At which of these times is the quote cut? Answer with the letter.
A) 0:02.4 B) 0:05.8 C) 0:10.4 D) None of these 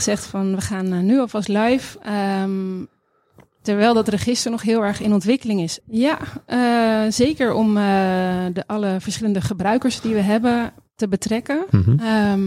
B